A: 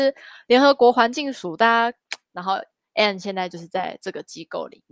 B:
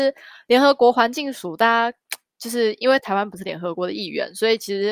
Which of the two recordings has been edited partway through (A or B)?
A